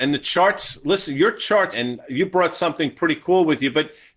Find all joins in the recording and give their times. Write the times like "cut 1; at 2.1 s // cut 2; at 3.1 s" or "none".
cut 1; at 1.7 s

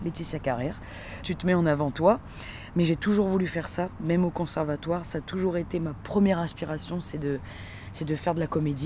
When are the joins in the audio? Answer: cut 1; at 1.2 s

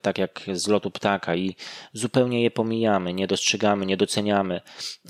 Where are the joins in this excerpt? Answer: none

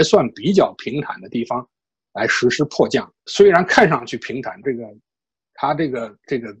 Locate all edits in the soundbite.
cut 1; at 3.3 s // cut 2; at 4.6 s

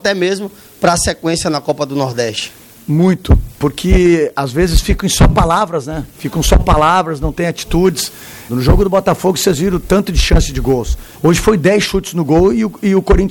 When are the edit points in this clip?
cut 1; at 8.5 s // cut 2; at 11.1 s

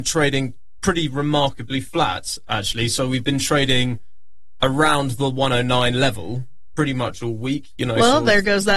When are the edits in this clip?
none

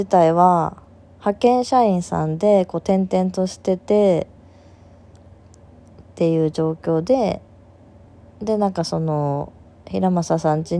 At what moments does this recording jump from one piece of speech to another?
none

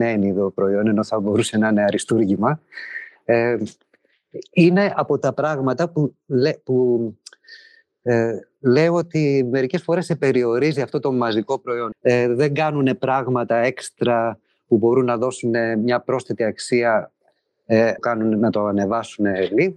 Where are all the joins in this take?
cut 1; at 11.9 s // cut 2; at 18.0 s

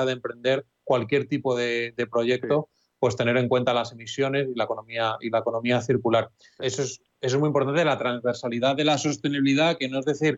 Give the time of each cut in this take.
cut 1; at 6.6 s

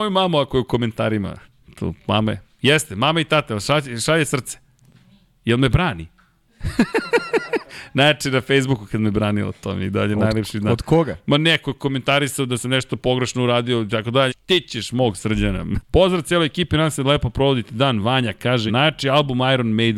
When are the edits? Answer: cut 1; at 14.3 s // cut 2; at 15.8 s // cut 3; at 18.7 s

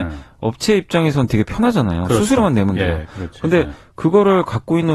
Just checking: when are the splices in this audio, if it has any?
none

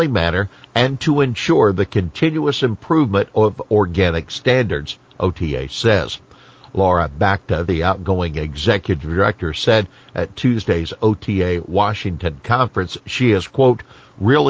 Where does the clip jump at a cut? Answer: none

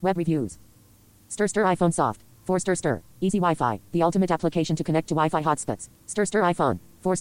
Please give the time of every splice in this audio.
cut 1; at 6.0 s

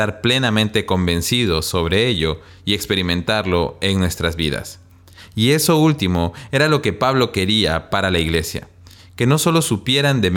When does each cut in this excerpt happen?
none

